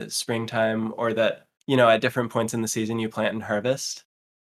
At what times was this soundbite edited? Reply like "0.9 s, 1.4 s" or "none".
1.5 s